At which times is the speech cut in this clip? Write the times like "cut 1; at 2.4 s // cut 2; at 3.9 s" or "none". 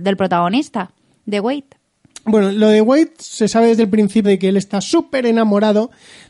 cut 1; at 4.2 s